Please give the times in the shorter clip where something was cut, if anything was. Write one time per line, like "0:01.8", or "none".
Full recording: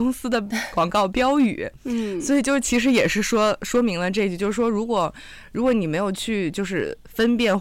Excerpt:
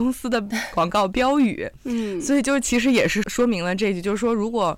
0:03.2